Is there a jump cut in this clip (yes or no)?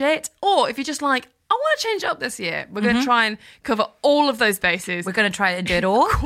no